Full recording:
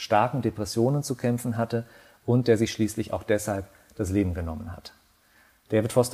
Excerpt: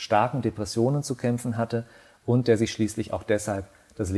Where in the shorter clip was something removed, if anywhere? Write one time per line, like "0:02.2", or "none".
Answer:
none